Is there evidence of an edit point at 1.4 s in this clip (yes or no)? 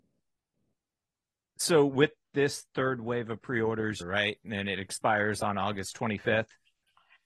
no